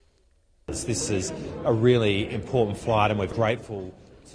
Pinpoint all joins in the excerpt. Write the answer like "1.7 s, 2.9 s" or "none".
1.7 s, 3.3 s